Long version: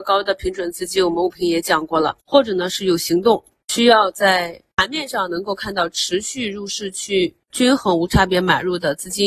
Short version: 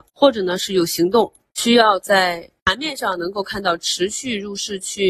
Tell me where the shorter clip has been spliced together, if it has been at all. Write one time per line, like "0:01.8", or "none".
none